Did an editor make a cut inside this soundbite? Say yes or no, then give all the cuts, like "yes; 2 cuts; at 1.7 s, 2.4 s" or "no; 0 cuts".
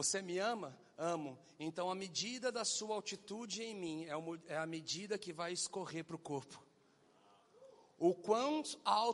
no; 0 cuts